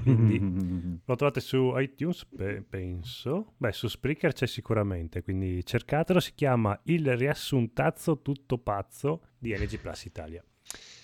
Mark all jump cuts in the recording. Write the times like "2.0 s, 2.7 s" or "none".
9.3 s